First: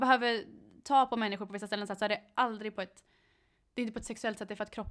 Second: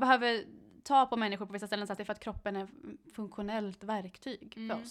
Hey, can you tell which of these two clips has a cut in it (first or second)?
second